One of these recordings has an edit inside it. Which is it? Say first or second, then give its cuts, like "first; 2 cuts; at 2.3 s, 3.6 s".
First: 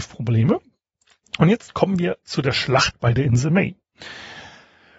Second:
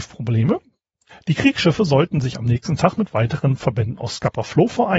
second; 1 cut; at 1.1 s